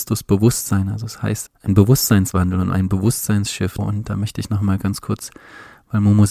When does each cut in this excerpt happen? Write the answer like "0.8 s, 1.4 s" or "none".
1.5 s, 3.8 s